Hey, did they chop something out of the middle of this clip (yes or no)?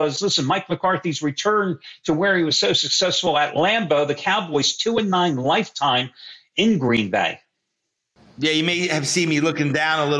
no